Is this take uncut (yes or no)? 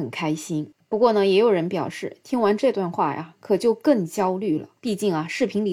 no